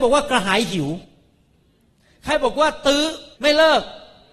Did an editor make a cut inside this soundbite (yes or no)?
yes